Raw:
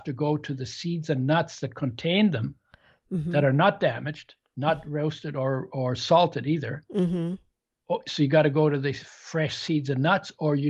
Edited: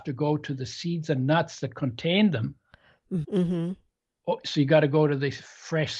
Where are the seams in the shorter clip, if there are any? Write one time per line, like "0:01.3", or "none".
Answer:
0:03.2

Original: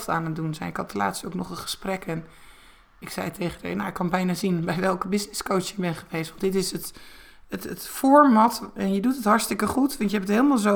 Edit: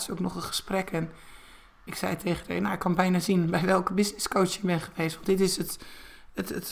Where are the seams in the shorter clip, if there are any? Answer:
none

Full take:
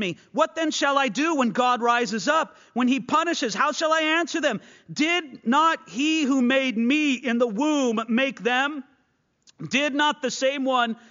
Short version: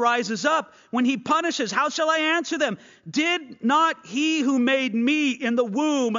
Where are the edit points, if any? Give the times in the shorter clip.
none

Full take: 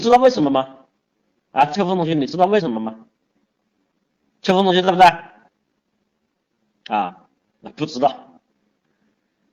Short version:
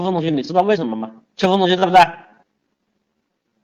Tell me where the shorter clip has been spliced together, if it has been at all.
0:01.3

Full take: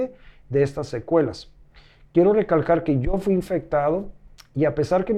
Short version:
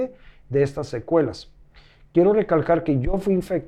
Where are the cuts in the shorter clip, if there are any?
none

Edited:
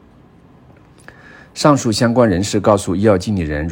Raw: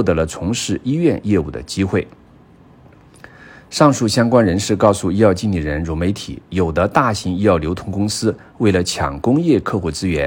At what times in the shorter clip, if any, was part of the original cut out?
none

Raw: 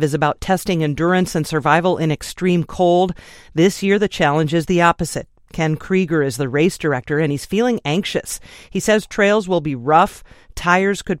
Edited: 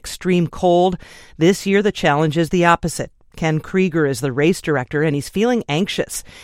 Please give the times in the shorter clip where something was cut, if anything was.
none

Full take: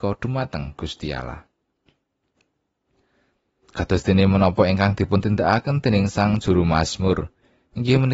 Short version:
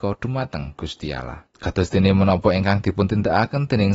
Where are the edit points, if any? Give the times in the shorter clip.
0:01.5

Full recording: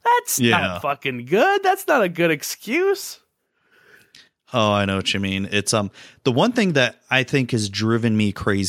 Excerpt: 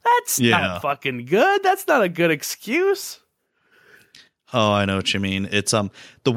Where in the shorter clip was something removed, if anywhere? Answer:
none

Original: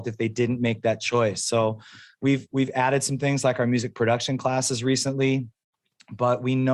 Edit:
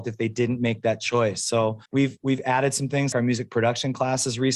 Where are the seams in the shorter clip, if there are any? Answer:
0:01.9
0:03.1

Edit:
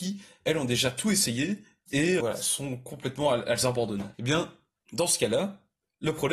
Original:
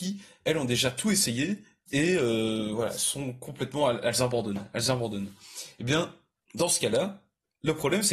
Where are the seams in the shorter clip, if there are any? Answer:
0:02.2
0:04.1

